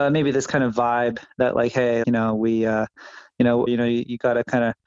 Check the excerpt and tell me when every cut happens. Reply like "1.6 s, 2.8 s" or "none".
2.0 s, 3.7 s